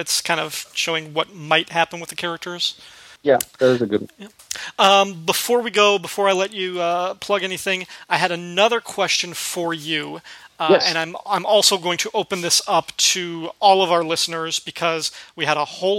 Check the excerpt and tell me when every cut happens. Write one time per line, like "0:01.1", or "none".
none

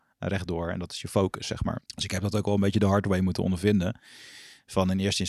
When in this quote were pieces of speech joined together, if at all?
0:01.9

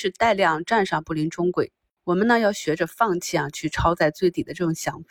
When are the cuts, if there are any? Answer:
none

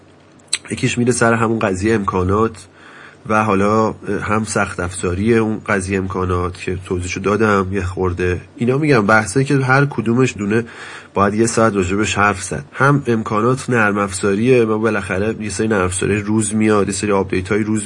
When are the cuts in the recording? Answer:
0:10.4
0:12.7

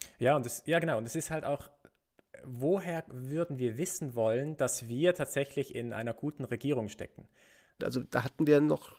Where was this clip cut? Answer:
0:07.8

